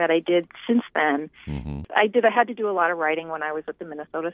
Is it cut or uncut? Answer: uncut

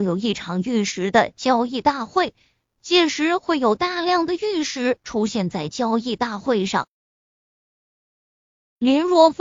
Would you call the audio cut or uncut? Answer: cut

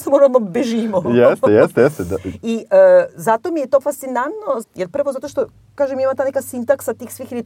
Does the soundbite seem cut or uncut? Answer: cut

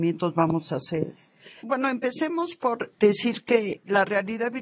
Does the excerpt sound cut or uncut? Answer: cut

